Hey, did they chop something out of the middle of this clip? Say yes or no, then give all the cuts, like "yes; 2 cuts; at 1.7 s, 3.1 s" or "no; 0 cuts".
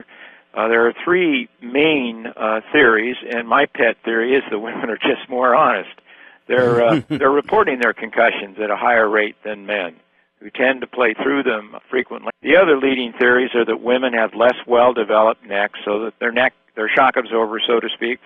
yes; 2 cuts; at 12.3 s, 16.1 s